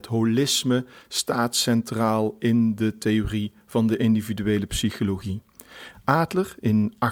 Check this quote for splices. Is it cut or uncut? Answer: cut